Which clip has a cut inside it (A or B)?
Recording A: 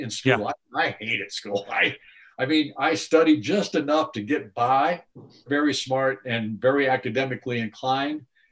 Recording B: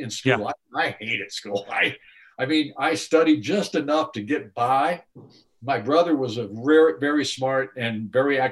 A